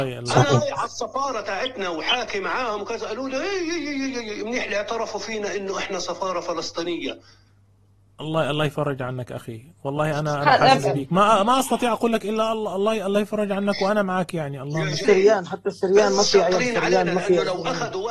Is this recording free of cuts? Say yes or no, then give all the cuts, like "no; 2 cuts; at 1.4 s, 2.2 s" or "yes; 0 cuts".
no; 1 cut; at 15.0 s